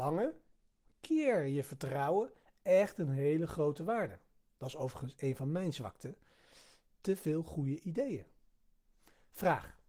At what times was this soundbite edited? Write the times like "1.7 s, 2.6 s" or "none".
4.4 s